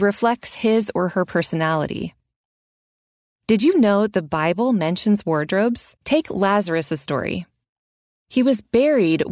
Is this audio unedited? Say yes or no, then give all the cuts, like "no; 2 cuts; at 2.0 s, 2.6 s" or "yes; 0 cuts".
no; 1 cut; at 6.0 s